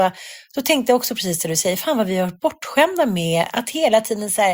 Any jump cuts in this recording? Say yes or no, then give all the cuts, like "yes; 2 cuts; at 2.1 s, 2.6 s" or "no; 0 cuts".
no; 0 cuts